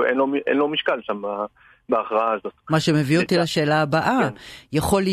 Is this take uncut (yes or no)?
no